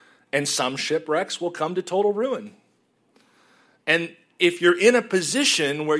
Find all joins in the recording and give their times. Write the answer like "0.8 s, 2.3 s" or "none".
none